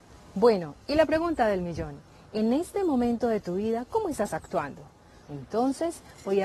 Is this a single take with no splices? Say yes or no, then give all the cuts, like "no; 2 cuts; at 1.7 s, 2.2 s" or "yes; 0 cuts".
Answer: no; 1 cut; at 5.2 s